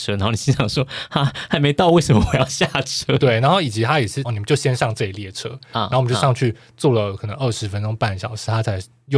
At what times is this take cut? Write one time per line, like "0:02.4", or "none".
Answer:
0:03.2
0:04.2